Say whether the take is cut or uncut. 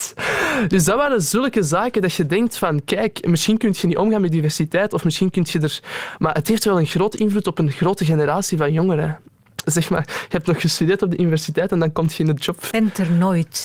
cut